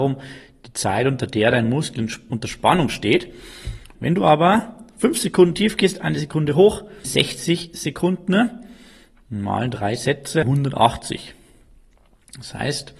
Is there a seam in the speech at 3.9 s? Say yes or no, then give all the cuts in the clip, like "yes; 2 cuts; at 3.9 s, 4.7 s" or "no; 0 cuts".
yes; 3 cuts; at 3.9 s, 7.0 s, 10.4 s